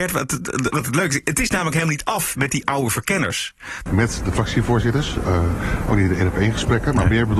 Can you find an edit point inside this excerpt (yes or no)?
yes